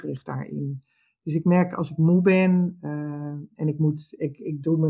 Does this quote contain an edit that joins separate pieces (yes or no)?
no